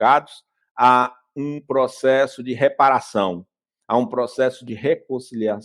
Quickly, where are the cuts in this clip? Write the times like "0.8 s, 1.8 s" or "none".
none